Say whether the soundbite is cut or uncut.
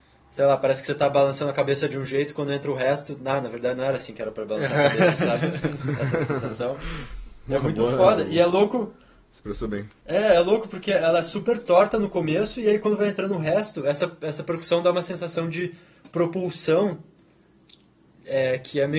uncut